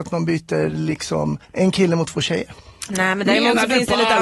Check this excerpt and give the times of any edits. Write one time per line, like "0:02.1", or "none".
0:01.4